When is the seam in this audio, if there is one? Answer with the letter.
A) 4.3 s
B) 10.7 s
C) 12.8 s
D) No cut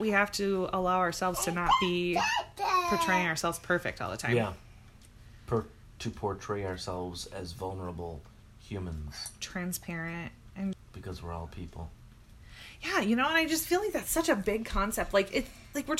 B